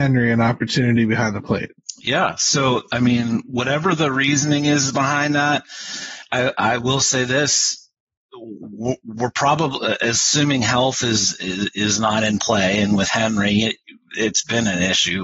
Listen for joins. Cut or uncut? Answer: uncut